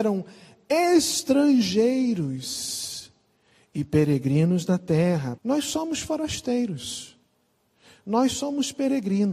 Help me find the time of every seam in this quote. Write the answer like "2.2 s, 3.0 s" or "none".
5.4 s